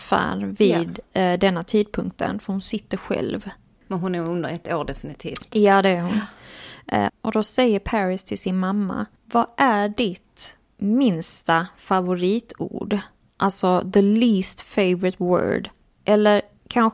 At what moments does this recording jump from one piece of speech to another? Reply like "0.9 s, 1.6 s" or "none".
7.1 s